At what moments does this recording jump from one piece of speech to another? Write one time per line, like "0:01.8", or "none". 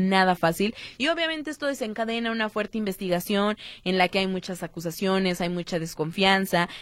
0:01.0